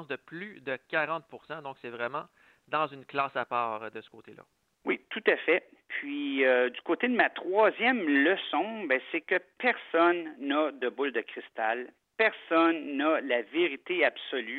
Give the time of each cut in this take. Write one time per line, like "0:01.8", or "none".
none

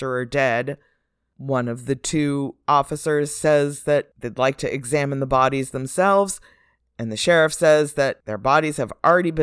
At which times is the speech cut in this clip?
none

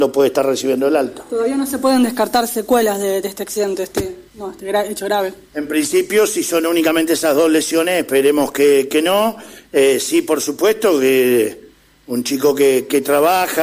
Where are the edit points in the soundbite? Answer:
none

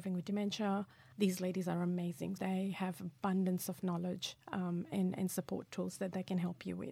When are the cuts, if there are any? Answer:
0:01.1
0:02.4

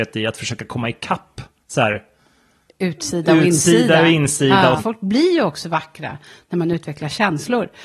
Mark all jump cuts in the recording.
0:04.8

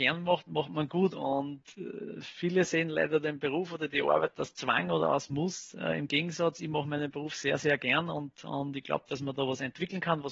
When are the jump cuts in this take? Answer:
none

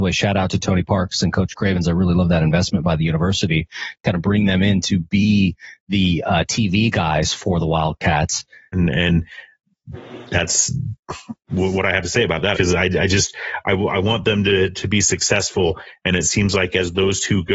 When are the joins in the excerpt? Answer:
0:08.7
0:12.5

